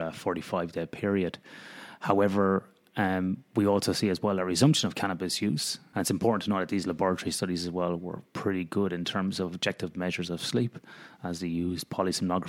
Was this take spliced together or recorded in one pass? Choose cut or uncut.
cut